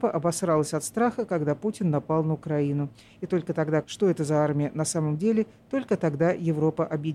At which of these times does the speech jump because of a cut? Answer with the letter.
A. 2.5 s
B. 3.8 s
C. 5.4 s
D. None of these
B